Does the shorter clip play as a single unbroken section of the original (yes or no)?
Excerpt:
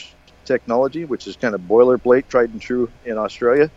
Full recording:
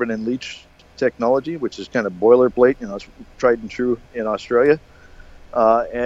no